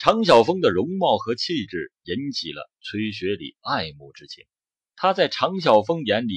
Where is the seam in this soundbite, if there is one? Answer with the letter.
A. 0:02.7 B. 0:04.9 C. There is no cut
B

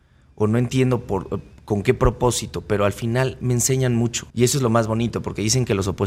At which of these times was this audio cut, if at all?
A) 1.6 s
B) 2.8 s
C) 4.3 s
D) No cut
C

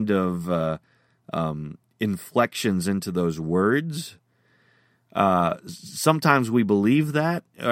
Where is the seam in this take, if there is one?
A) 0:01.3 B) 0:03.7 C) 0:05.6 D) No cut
D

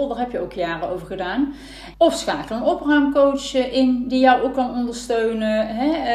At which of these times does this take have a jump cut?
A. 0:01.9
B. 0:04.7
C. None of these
A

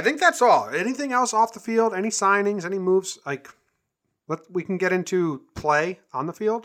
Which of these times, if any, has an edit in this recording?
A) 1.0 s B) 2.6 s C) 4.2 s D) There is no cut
D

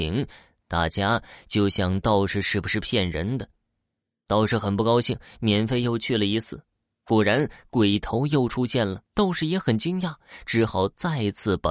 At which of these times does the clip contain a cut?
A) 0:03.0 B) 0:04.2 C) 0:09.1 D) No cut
C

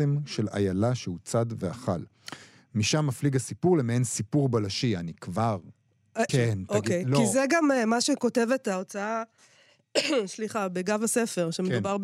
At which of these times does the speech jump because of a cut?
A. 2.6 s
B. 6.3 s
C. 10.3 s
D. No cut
B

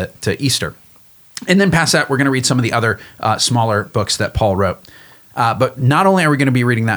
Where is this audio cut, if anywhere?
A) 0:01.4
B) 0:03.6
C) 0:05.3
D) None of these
C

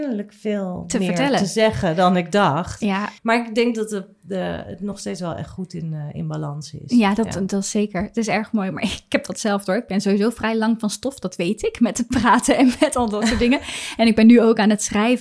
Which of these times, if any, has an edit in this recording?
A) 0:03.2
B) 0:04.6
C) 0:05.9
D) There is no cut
A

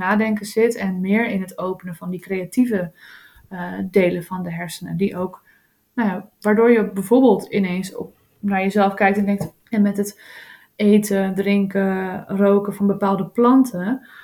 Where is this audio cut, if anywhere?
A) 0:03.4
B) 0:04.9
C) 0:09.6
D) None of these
C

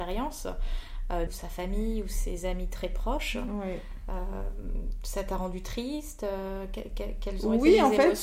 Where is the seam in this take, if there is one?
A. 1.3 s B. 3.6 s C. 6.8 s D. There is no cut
A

